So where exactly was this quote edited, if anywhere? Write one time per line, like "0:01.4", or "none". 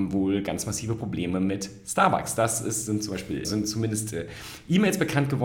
0:03.4